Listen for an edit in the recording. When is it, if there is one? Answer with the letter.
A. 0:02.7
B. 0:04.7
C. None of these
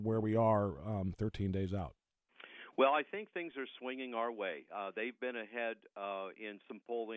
C